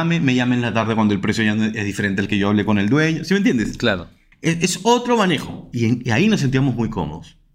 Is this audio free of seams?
yes; 0 cuts

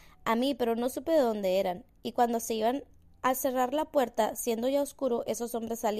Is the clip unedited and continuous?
yes; 0 cuts

